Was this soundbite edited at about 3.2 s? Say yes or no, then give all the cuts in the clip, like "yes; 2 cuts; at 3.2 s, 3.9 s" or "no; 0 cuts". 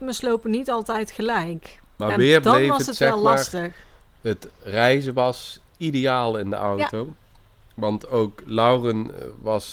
no; 0 cuts